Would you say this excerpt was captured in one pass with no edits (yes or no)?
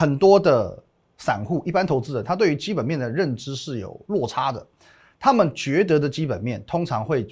yes